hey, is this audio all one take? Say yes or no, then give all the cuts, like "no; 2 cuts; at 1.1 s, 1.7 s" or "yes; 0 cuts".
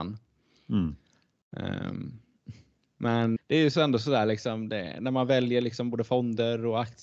no; 1 cut; at 3.4 s